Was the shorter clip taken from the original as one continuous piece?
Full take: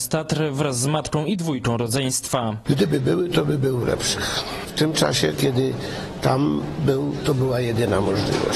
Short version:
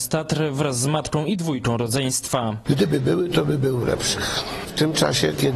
yes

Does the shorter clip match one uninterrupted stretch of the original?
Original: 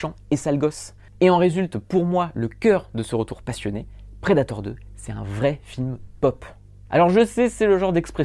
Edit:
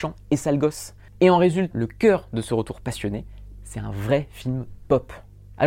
no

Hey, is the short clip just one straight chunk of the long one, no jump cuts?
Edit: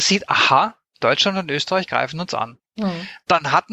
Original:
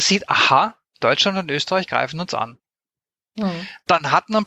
no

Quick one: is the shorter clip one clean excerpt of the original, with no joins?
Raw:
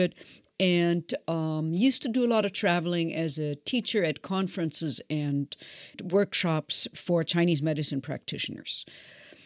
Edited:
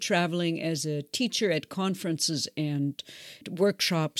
yes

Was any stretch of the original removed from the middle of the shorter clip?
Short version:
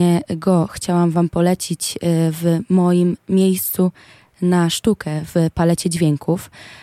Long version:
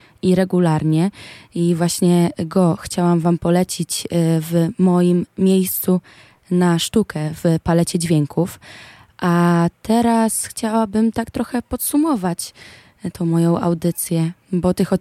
no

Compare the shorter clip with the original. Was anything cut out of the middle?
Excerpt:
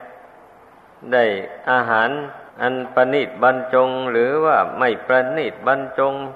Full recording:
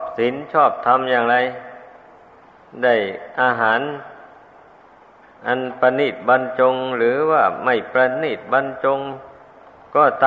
yes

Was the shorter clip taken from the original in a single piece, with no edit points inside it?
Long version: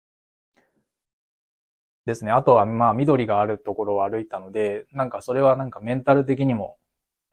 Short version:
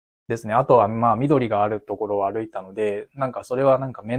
yes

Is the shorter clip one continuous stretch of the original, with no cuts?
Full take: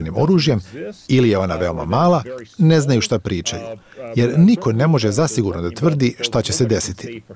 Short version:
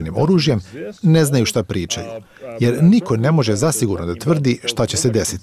no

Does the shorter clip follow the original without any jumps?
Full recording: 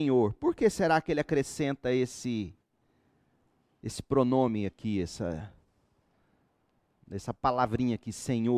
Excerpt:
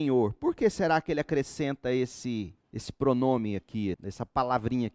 no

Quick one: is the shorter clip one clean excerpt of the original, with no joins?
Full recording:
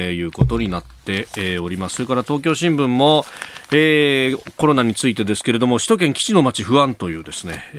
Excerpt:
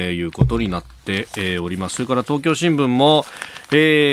yes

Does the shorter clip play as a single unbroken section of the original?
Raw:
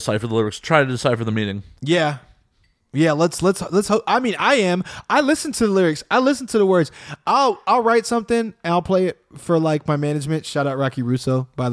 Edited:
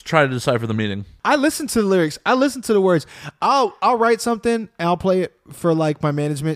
no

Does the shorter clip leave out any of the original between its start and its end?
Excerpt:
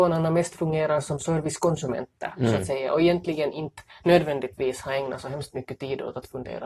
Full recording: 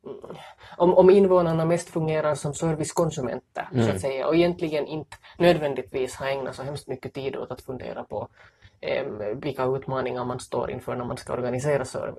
no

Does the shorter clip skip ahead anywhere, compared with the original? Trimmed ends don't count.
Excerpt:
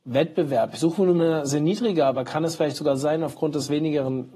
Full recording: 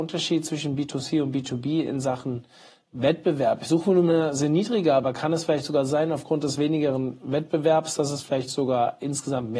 no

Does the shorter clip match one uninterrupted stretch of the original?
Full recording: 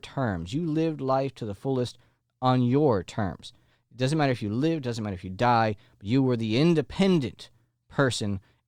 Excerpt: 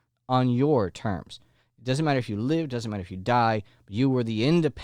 yes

